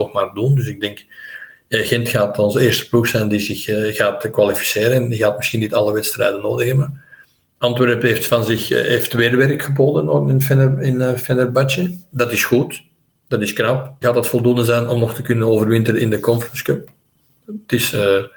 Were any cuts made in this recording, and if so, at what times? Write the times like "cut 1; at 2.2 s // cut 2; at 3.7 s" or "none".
cut 1; at 14.0 s // cut 2; at 17.4 s

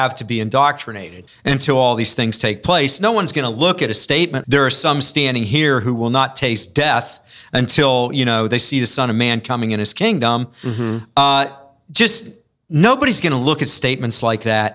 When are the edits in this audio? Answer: cut 1; at 1.3 s // cut 2; at 4.4 s

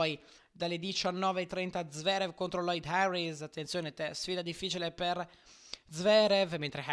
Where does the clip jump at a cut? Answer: none

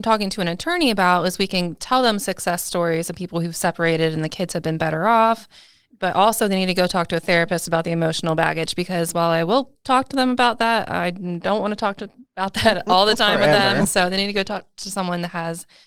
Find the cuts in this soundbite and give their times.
none

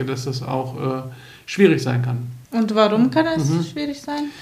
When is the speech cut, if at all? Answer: cut 1; at 2.4 s

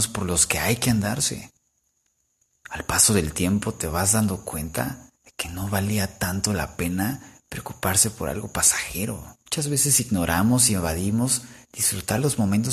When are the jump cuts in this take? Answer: cut 1; at 2.6 s // cut 2; at 5.2 s // cut 3; at 9.5 s

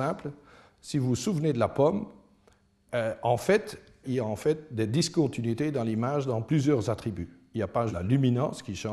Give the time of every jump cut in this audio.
cut 1; at 4.0 s // cut 2; at 7.9 s

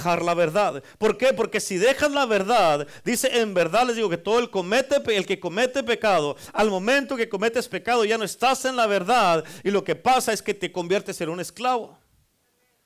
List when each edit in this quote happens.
none

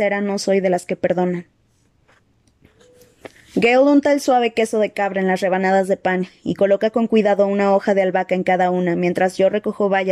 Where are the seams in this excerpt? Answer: none

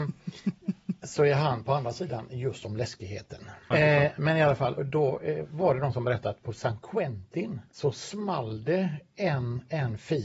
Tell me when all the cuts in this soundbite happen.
cut 1; at 3.7 s // cut 2; at 4.8 s // cut 3; at 7.7 s

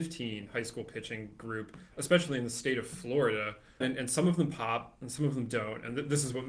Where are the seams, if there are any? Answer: cut 1; at 3.8 s

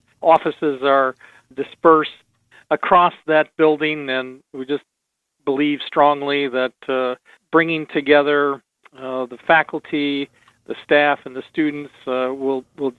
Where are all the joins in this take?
none

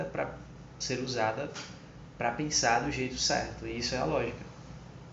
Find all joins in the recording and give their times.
none

